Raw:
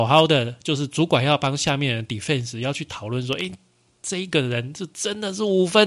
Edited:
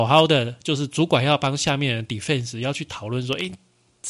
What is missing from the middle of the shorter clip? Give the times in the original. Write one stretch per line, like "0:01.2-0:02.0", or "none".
none